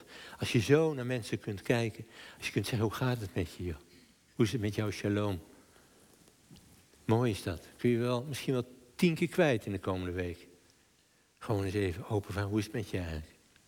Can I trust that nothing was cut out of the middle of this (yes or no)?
yes